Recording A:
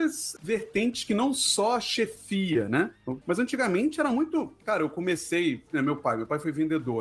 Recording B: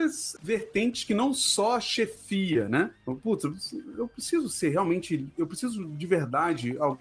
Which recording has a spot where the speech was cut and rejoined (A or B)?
A